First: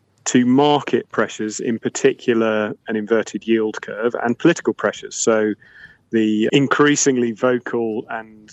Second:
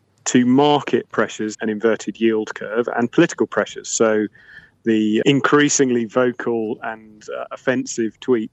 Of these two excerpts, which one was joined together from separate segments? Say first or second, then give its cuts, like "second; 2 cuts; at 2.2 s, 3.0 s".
second; 1 cut; at 1.5 s